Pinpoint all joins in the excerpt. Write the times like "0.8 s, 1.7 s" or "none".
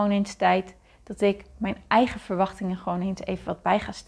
none